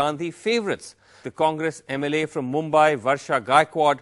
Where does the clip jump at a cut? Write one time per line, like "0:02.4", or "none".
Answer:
0:01.2